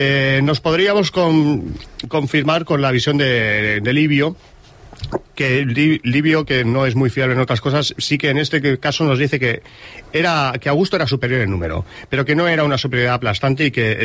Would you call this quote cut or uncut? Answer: uncut